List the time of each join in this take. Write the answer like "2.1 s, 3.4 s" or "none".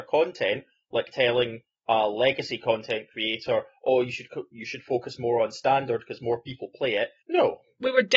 7.2 s

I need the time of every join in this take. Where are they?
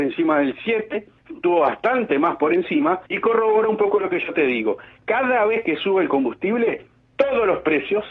3.1 s

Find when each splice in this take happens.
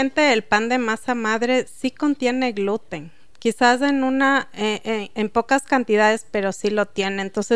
none

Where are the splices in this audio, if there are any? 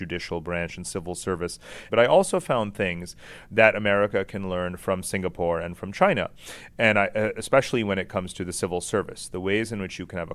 1.9 s

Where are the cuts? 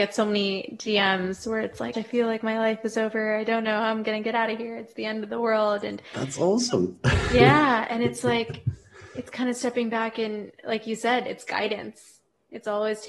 1.9 s

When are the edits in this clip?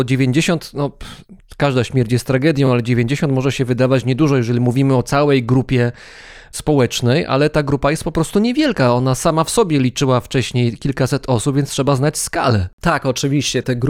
none

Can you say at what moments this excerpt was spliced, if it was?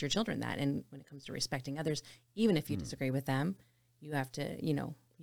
none

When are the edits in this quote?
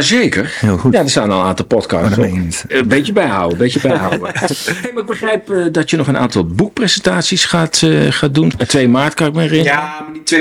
2.7 s, 8.5 s

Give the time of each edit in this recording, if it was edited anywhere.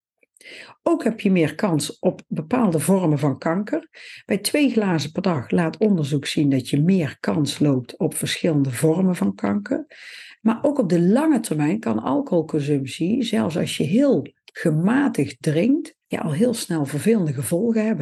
10.4 s, 16.0 s

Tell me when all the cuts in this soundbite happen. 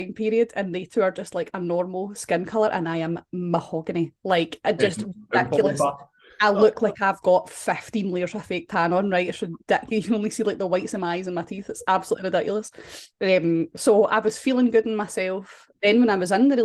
15.7 s

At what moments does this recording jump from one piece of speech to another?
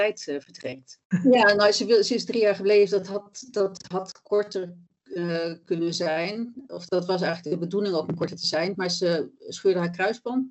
none

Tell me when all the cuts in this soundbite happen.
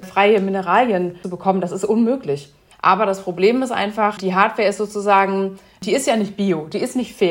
2.7 s, 4.2 s

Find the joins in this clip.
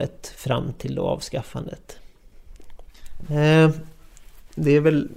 3.2 s

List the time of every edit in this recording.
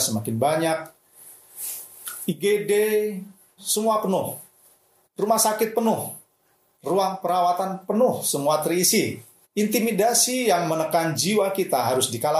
3.6 s, 9.4 s

